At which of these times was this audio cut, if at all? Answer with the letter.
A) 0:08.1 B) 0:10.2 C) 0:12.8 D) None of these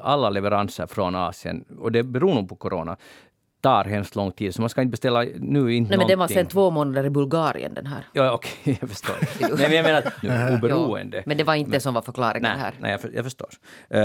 B